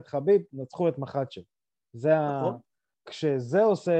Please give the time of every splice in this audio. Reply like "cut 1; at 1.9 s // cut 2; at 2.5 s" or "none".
cut 1; at 2.9 s